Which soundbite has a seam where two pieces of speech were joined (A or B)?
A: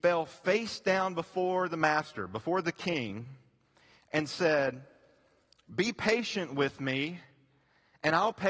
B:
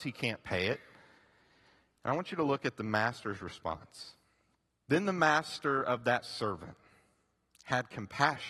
B